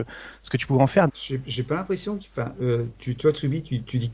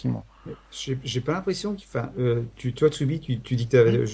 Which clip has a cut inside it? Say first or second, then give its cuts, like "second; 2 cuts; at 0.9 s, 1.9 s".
first; 1 cut; at 1.1 s